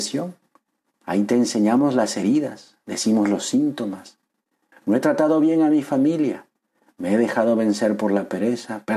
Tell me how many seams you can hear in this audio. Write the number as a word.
one